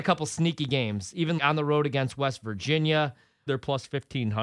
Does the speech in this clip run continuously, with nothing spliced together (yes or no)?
no